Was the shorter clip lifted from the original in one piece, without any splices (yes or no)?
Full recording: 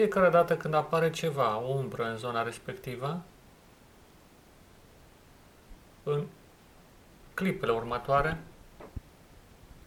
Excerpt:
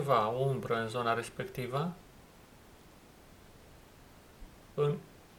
yes